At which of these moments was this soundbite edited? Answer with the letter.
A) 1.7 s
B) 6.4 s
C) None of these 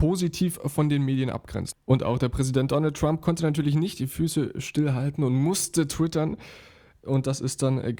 A